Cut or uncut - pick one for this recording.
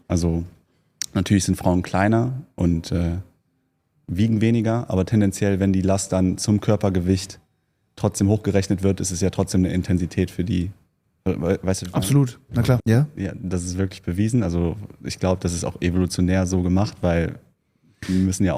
cut